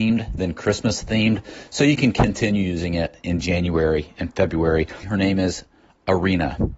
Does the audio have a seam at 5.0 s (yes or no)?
yes